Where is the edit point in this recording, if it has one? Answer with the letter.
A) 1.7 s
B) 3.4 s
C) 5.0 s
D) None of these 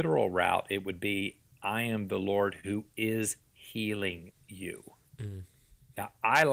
D